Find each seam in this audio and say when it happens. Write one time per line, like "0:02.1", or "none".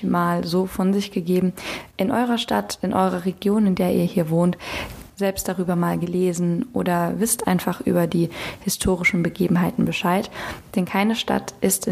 0:01.9
0:05.1

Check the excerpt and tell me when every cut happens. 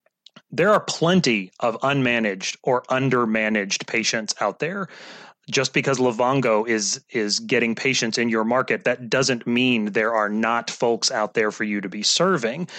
none

